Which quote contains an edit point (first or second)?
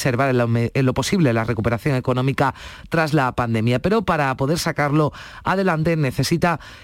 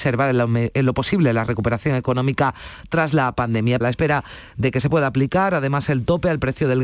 second